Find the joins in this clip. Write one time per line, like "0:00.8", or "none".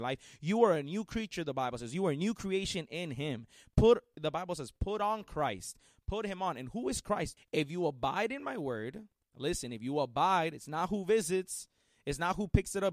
0:07.4